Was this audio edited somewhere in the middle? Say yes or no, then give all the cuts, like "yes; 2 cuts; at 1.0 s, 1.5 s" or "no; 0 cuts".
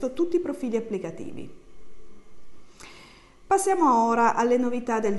no; 0 cuts